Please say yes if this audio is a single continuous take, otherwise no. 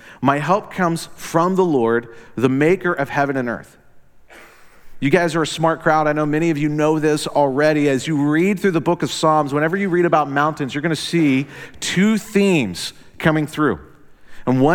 yes